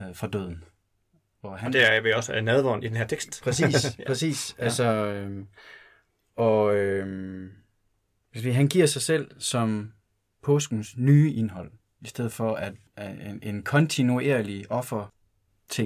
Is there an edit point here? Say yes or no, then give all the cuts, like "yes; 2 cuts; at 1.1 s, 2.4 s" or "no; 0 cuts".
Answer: no; 0 cuts